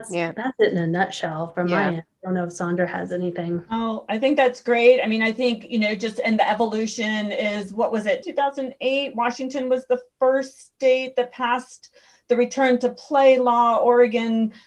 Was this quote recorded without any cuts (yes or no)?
no